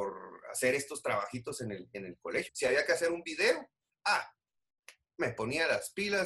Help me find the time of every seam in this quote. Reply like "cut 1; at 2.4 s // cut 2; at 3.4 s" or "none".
cut 1; at 2.5 s